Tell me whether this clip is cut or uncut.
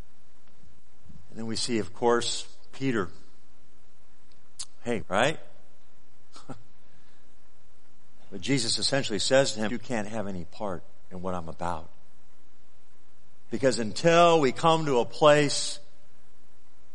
cut